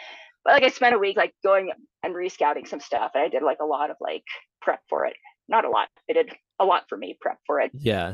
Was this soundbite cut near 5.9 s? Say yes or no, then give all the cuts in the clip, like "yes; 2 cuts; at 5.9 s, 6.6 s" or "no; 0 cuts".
no; 1 cut; at 4.6 s